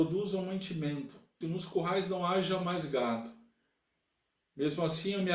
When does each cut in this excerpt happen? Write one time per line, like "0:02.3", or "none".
0:01.4